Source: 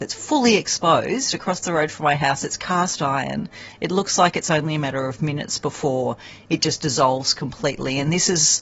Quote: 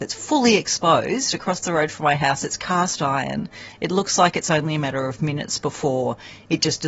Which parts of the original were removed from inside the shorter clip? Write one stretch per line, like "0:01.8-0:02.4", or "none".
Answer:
none